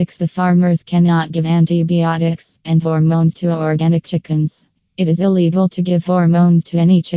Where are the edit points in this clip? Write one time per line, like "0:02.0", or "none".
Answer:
0:02.6